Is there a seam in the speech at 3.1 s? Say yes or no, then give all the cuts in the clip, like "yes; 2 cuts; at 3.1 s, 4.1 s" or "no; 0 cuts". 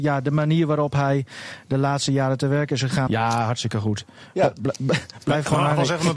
yes; 1 cut; at 3.1 s